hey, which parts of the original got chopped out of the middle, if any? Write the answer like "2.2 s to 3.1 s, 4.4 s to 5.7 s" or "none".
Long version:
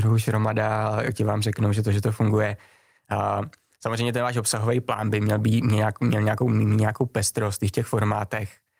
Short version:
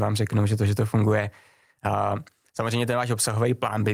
none